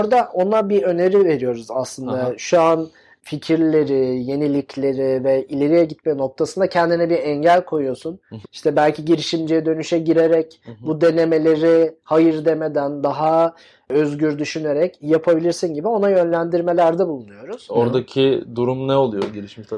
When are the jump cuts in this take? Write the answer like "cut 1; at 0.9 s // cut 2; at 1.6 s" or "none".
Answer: cut 1; at 8.4 s // cut 2; at 17.7 s